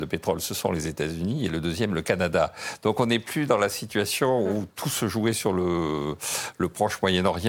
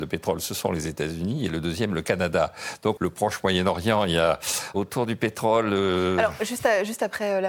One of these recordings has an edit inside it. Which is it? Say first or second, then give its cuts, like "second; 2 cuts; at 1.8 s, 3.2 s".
second; 2 cuts; at 3.0 s, 4.7 s